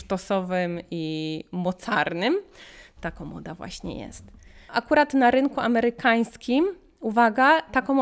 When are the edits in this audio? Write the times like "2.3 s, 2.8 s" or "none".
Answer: 3.0 s, 4.7 s